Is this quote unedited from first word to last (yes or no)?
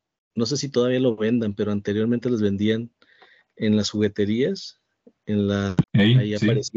no